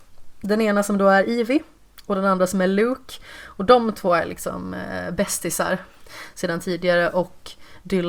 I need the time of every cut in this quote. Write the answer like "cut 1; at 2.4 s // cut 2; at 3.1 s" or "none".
none